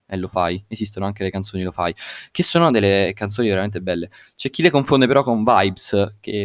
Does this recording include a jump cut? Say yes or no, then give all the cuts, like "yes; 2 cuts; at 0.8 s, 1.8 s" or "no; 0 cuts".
no; 0 cuts